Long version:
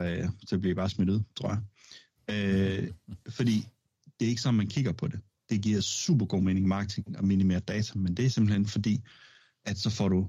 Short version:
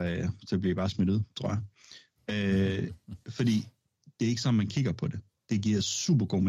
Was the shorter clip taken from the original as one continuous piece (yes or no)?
yes